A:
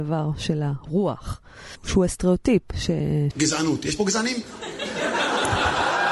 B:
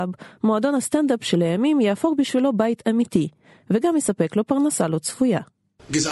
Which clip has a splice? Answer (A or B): A